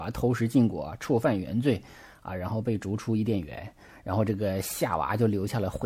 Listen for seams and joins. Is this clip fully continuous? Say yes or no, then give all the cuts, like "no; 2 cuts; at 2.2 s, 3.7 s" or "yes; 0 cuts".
yes; 0 cuts